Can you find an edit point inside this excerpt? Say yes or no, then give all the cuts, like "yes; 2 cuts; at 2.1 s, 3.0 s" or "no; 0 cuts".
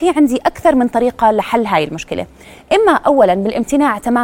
no; 0 cuts